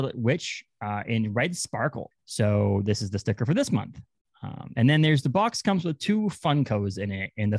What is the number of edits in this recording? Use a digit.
1